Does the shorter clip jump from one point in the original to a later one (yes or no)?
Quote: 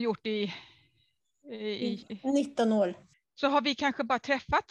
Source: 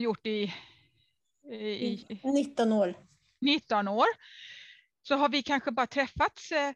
yes